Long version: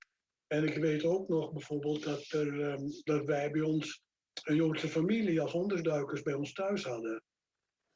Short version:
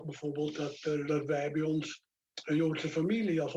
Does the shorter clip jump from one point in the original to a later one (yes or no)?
yes